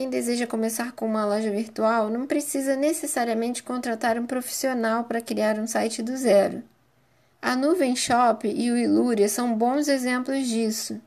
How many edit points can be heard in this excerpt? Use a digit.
1